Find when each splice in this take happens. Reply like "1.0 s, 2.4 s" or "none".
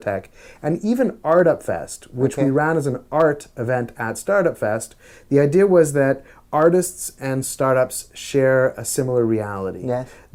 none

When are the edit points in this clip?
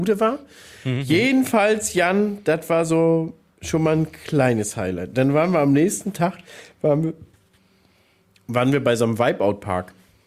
none

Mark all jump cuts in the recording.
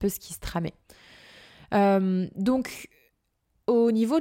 none

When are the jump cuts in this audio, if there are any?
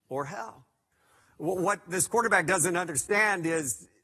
none

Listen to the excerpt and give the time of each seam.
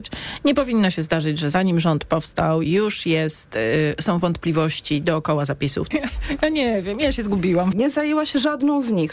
5.9 s, 7.7 s

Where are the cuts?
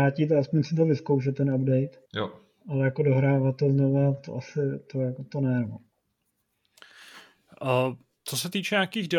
2.1 s

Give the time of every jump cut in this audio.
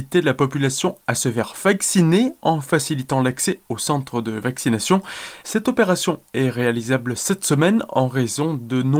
5.4 s

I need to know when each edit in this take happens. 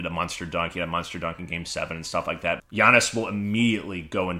2.6 s

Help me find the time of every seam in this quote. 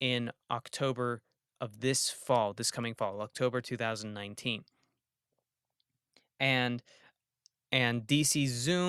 none

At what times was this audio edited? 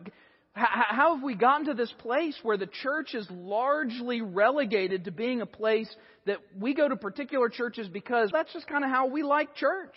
8.3 s

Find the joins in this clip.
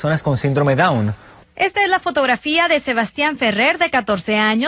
1.4 s

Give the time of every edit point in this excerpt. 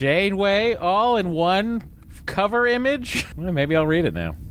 3.3 s

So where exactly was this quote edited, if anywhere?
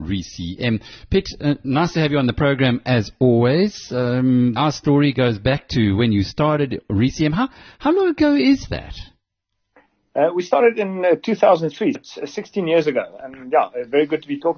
4.6 s, 11.9 s

